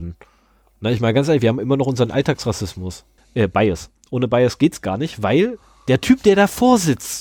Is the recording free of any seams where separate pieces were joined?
no; 1 cut; at 3.2 s

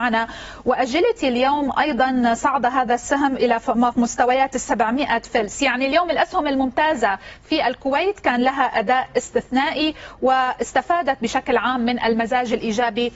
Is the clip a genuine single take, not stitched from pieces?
no; 1 cut; at 3.9 s

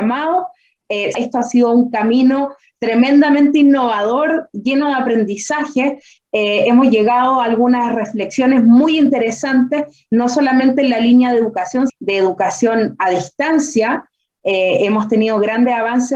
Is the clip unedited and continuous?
no; 2 cuts; at 1.1 s, 11.9 s

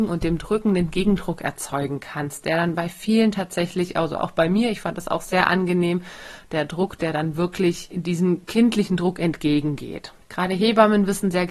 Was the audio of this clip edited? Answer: yes; 1 cut; at 10.2 s

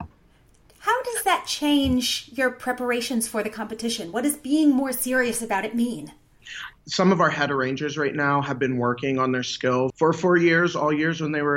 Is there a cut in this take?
yes; 2 cuts; at 6.7 s, 9.9 s

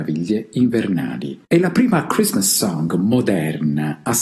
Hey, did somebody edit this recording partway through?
yes; 1 cut; at 1.4 s

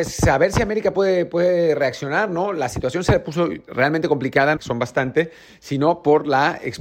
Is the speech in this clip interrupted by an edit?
yes; 1 cut; at 4.6 s

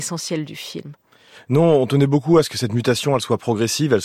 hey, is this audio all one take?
yes; 0 cuts

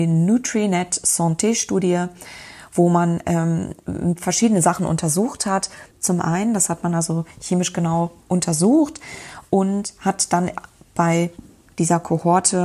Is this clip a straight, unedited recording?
no; 2 cuts; at 5.9 s, 8.2 s

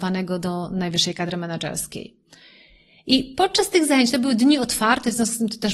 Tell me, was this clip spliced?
no; 0 cuts

